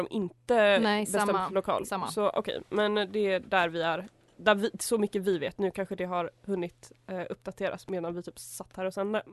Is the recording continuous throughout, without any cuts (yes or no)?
yes